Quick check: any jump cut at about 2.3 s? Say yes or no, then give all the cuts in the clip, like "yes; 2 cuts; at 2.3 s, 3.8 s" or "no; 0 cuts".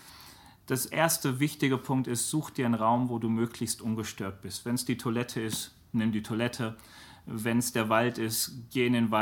no; 0 cuts